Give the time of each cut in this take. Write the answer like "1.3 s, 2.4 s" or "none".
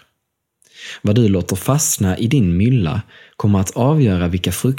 none

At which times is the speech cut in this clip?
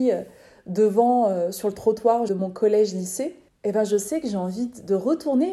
2.3 s, 3.5 s

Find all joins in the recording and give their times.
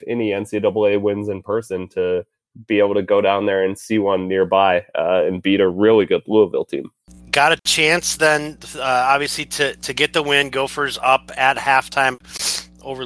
none

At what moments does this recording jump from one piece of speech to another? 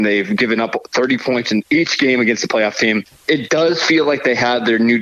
none

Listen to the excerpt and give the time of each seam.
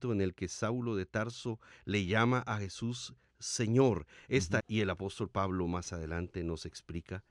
1.7 s, 4.6 s

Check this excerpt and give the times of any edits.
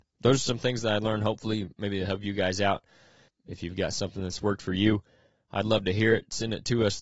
3.3 s

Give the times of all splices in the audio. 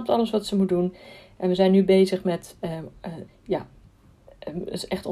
3.3 s

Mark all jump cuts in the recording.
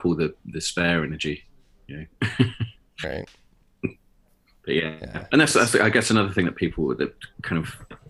none

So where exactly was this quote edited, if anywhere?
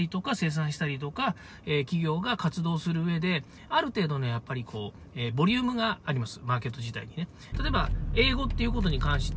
7.5 s

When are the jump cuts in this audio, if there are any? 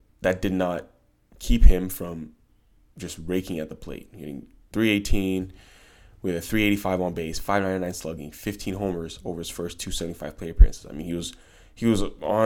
none

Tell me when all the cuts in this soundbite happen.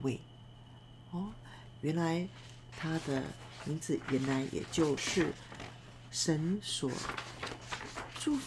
2.7 s, 5.0 s

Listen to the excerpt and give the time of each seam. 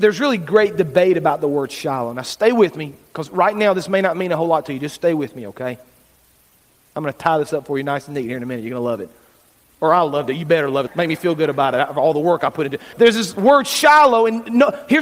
10.9 s, 12.9 s

